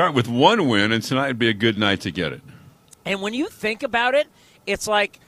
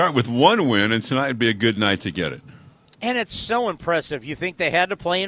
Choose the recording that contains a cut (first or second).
second